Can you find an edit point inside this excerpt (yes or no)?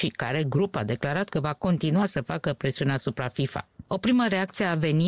yes